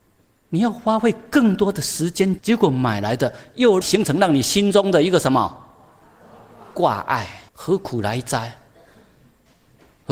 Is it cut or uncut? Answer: cut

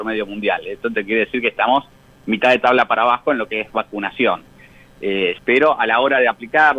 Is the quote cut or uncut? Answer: cut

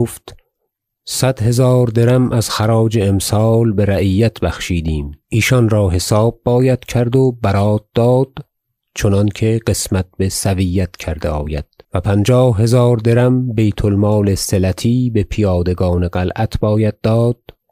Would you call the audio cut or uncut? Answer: cut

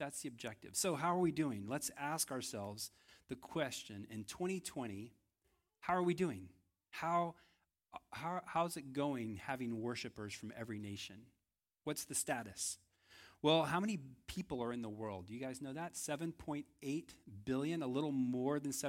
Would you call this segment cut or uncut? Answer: uncut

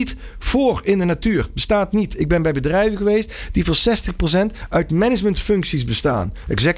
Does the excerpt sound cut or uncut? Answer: uncut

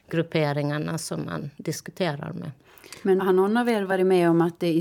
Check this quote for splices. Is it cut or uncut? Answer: cut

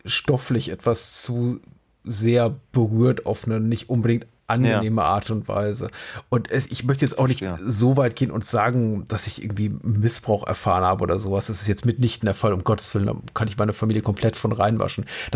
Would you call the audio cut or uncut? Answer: uncut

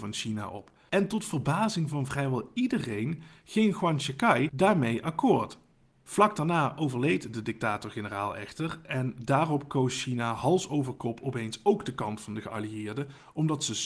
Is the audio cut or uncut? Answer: uncut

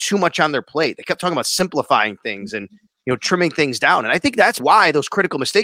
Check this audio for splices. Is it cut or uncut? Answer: cut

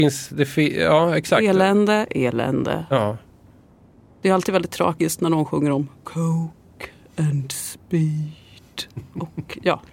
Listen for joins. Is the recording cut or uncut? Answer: cut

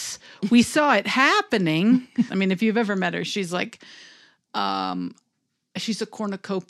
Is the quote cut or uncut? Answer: cut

